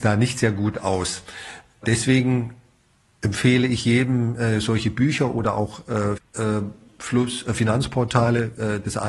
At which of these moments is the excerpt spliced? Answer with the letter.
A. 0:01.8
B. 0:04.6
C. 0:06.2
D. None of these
C